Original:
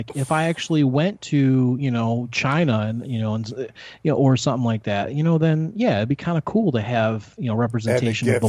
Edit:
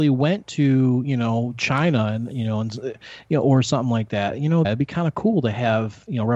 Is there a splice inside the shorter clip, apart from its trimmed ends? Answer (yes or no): yes